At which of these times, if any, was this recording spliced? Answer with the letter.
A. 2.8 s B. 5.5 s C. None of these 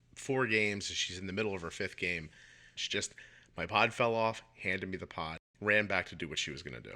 A